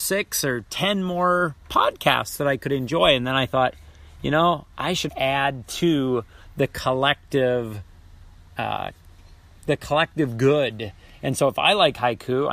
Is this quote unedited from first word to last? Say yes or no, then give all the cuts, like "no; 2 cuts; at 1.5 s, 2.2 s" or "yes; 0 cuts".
no; 1 cut; at 5.1 s